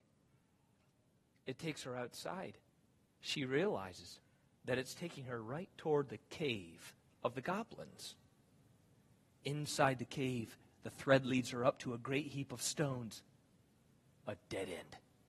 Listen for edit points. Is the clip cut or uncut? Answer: uncut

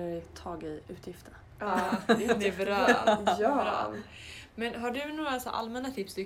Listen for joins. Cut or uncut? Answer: uncut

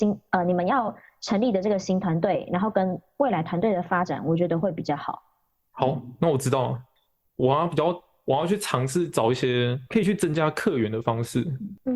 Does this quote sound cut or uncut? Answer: uncut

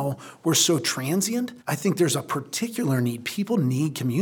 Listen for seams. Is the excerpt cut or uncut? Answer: cut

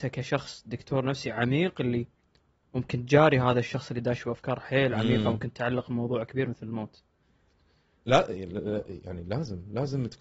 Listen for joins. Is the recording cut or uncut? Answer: uncut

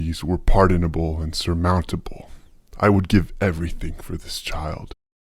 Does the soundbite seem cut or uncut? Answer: uncut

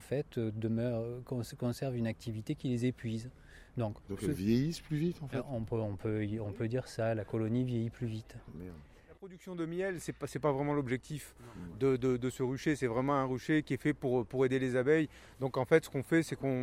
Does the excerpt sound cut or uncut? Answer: uncut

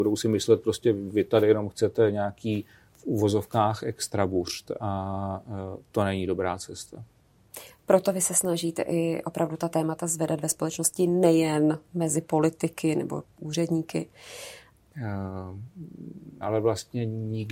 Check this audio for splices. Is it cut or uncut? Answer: cut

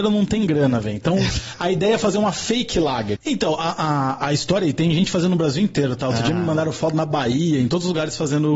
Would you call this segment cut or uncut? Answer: cut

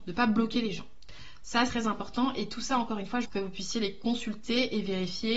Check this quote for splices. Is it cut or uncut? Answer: cut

